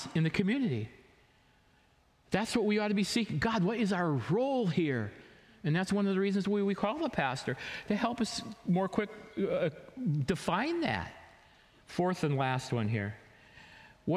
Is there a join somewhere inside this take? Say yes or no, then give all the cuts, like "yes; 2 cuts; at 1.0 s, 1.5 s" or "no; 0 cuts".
yes; 1 cut; at 11.8 s